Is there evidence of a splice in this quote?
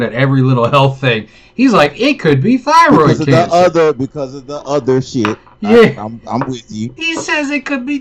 yes; 1 cut; at 7.0 s

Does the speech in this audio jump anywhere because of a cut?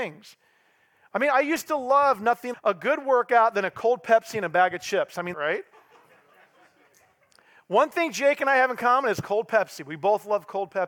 yes; 2 cuts; at 2.5 s, 5.3 s

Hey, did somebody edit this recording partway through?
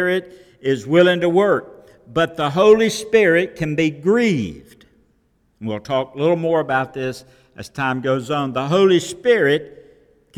no; 0 cuts

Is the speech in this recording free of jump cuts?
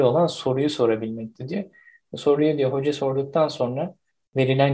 yes; 0 cuts

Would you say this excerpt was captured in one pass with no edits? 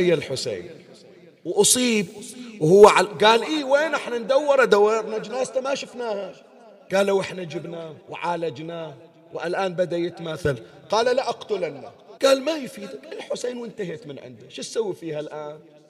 no; 2 cuts; at 8.0 s, 12.2 s

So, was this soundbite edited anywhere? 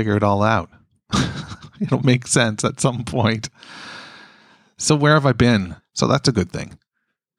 yes; 1 cut; at 5.8 s

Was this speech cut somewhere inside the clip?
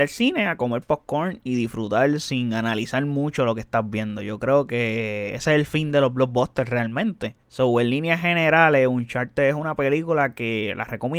yes; 1 cut; at 7.4 s

